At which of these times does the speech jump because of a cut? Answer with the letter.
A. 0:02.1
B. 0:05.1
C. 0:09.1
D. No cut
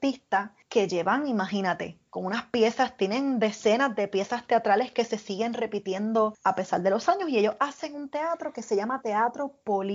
A